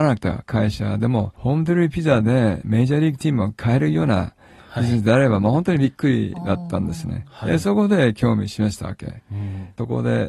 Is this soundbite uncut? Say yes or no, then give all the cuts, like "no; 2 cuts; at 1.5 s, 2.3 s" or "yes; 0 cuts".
no; 1 cut; at 1.3 s